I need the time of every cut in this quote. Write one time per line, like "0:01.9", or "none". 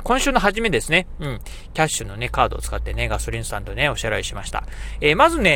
none